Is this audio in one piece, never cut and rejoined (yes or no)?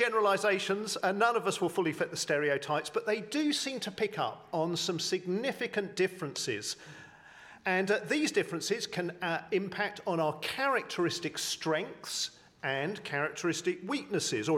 yes